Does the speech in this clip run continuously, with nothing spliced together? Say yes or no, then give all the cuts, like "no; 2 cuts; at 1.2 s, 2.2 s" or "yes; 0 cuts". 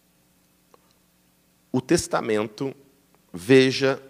yes; 0 cuts